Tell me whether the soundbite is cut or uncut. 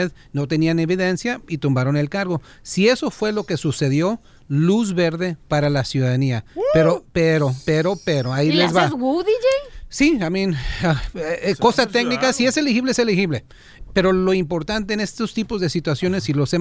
uncut